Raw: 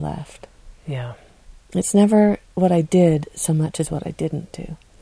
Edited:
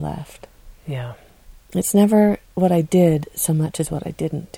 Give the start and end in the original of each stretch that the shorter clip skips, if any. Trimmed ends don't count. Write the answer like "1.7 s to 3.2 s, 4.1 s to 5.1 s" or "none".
none